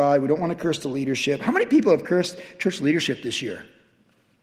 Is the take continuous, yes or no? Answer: yes